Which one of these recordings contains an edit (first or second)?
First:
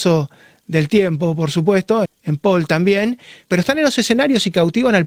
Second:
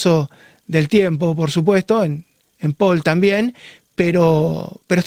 first